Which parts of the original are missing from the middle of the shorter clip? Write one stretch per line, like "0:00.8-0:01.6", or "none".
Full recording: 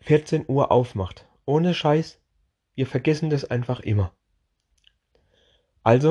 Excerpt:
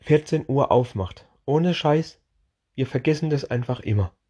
none